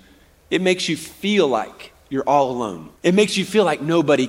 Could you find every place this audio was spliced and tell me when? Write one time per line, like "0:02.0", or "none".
0:03.0